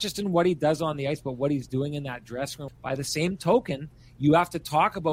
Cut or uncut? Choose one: cut